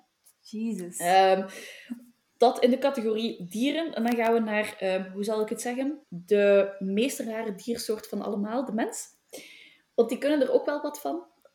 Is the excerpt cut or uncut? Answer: cut